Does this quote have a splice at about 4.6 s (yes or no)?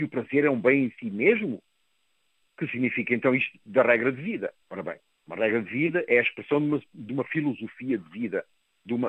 yes